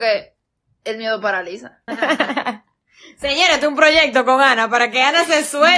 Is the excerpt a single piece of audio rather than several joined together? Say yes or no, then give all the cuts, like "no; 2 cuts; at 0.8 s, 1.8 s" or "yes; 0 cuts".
no; 1 cut; at 1.9 s